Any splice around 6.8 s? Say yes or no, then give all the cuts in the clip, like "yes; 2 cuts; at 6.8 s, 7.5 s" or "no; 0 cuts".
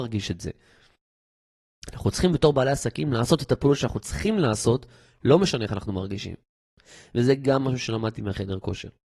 no; 0 cuts